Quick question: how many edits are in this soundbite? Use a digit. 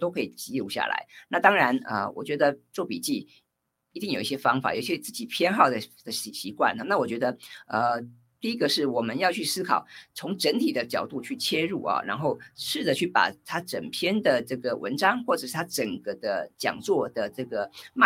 0